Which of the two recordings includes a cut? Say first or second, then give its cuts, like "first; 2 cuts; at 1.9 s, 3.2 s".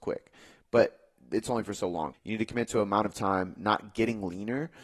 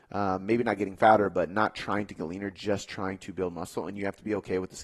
first; 1 cut; at 2.1 s